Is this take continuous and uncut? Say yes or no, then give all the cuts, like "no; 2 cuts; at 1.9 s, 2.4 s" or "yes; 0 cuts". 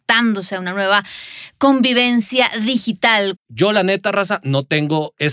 no; 1 cut; at 3.3 s